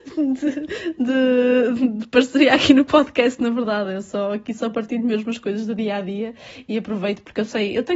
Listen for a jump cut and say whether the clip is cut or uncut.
uncut